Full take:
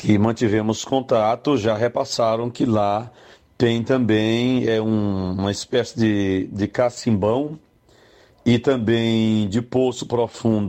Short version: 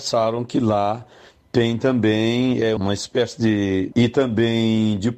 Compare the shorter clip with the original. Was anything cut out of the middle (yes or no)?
yes